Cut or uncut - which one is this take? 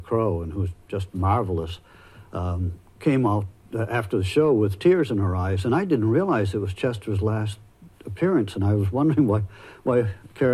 uncut